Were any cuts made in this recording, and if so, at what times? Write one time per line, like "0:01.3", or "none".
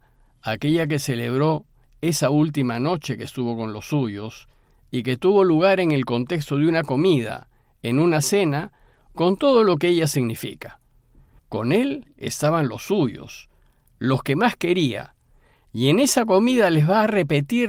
0:11.4